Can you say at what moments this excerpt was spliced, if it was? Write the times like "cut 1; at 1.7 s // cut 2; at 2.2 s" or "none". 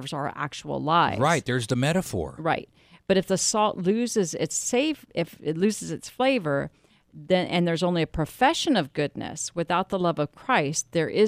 none

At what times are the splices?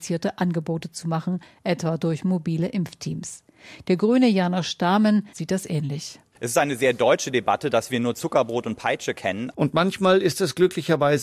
cut 1; at 5.3 s // cut 2; at 9.5 s

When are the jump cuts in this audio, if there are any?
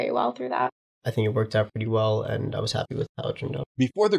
cut 1; at 0.9 s

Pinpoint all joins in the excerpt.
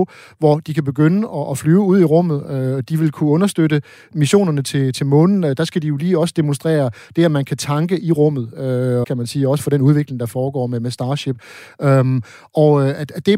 cut 1; at 9.0 s

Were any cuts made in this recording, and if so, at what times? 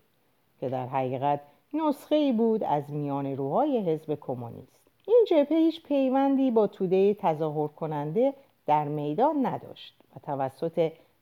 cut 1; at 5.0 s

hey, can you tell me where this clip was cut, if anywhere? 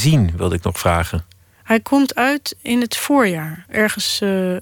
none

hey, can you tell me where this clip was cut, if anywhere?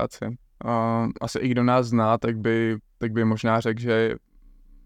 none

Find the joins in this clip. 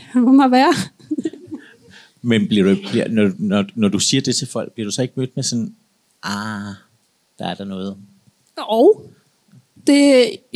none

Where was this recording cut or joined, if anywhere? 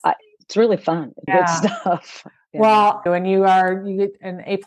cut 1; at 1.3 s // cut 2; at 3.1 s

